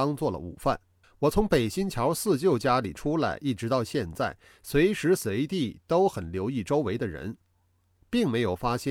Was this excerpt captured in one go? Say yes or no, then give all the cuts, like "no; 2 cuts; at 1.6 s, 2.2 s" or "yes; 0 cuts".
no; 1 cut; at 1.0 s